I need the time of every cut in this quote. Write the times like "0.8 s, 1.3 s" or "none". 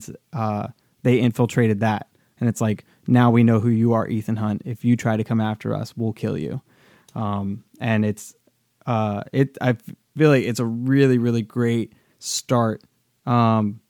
none

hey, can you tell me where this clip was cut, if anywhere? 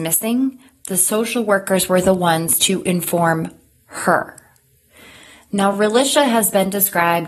none

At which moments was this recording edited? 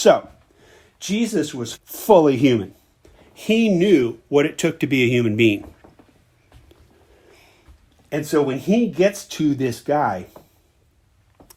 1.7 s

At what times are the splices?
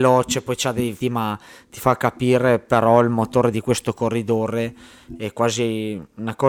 1.0 s

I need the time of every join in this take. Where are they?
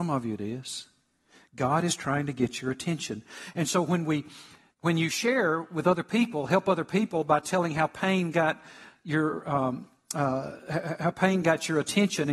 none

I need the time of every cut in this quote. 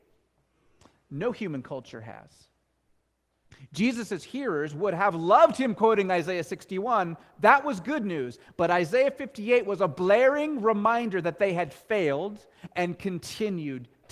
none

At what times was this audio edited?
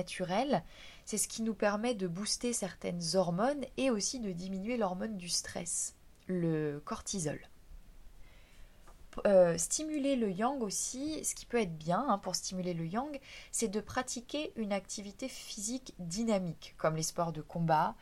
none

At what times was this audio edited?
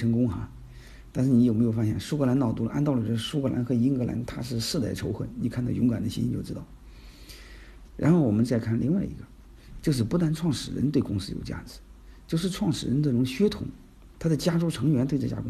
7.9 s, 14.1 s

